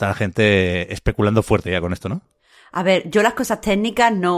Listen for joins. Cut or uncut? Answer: uncut